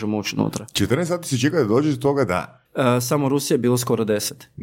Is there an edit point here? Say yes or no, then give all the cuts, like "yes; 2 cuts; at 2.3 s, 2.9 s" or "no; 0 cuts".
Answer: yes; 1 cut; at 2.7 s